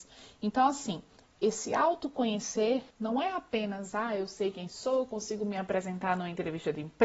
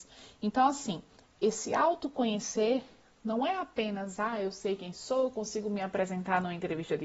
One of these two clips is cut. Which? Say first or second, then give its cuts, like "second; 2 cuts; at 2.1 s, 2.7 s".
first; 1 cut; at 2.9 s